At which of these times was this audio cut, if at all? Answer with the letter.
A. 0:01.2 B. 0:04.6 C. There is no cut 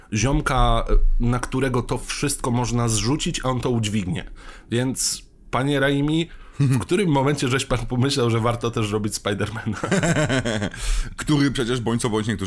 C